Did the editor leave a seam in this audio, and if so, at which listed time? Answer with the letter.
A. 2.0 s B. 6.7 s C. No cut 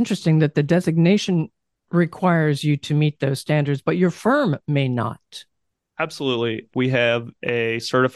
B